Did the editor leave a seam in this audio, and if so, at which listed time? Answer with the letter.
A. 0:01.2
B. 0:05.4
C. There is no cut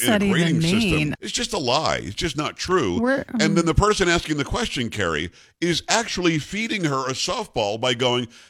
A